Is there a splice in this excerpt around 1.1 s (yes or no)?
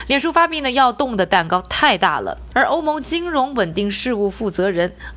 no